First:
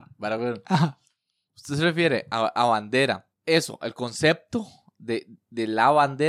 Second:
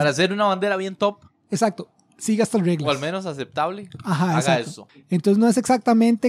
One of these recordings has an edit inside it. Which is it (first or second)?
second